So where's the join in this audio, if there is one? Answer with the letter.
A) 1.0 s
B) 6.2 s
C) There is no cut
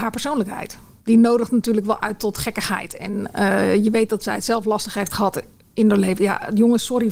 C